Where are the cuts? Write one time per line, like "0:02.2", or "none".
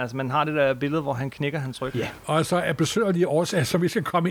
0:01.9